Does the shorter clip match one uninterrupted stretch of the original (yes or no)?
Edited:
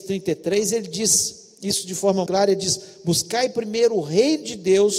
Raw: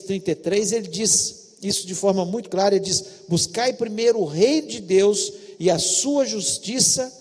no